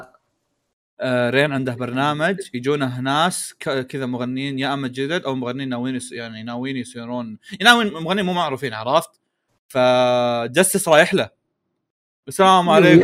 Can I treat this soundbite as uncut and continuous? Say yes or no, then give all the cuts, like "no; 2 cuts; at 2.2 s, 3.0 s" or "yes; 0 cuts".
no; 1 cut; at 9.5 s